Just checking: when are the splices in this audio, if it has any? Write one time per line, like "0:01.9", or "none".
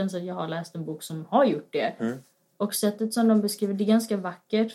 0:02.0